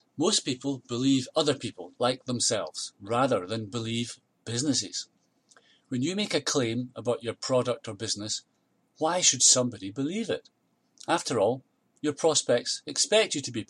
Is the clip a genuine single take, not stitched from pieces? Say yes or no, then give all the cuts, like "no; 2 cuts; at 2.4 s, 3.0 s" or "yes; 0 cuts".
no; 1 cut; at 2.0 s